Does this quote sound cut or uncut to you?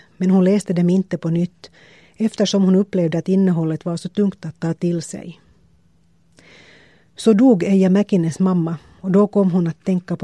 uncut